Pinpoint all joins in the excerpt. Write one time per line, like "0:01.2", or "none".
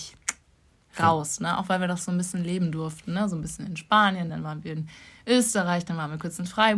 0:04.3